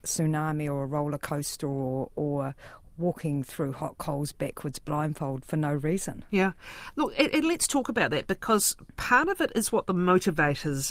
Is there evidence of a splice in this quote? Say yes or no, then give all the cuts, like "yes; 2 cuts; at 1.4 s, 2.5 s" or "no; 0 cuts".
no; 0 cuts